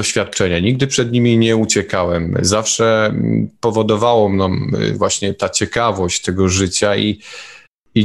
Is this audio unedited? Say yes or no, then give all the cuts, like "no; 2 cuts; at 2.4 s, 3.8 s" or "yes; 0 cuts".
yes; 0 cuts